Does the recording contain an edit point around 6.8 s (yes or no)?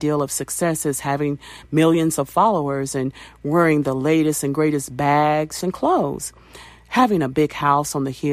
no